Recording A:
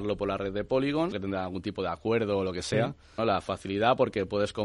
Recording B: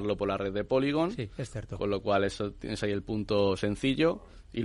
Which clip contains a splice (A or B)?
A